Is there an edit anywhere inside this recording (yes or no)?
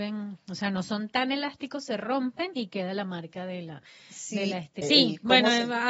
yes